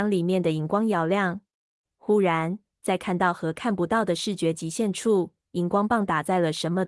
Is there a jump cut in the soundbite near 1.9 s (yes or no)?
yes